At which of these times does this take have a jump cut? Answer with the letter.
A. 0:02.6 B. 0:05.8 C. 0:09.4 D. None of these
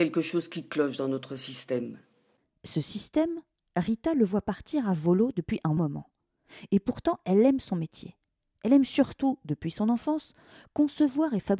B